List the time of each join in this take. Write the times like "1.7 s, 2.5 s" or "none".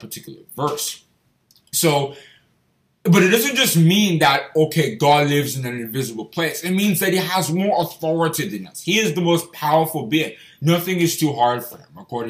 none